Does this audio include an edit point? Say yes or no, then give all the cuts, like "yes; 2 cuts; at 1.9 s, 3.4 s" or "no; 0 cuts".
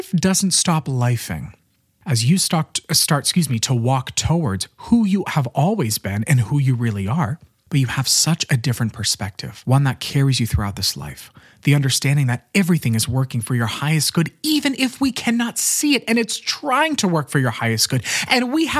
no; 0 cuts